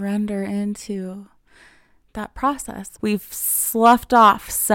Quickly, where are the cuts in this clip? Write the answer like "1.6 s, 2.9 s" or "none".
3.0 s

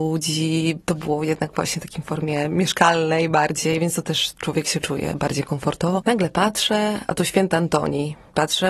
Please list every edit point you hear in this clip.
none

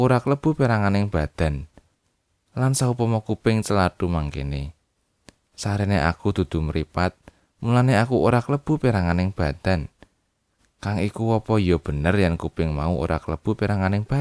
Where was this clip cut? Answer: 2.5 s

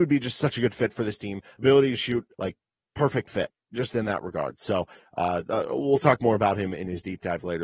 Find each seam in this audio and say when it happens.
2.3 s

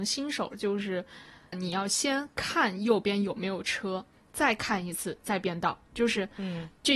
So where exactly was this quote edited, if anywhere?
1.5 s, 4.3 s

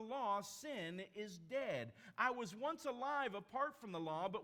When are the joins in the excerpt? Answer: none

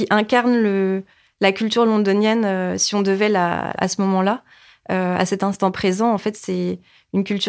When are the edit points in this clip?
3.8 s

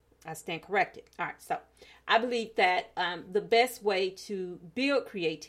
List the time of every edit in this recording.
none

